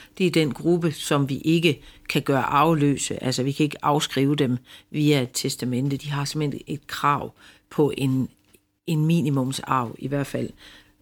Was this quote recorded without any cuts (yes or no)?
yes